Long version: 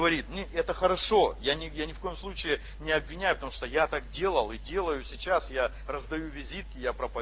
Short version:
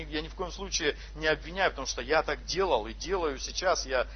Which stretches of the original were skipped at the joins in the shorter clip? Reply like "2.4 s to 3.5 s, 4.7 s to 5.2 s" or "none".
none